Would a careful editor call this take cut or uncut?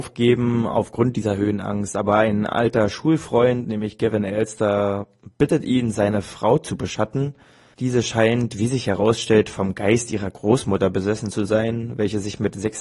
uncut